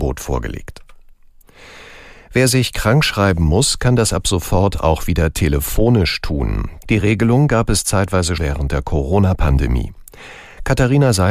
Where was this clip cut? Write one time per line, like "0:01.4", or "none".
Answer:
0:06.8
0:08.4